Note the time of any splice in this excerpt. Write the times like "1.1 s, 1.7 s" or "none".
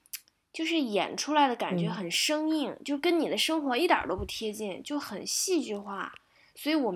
none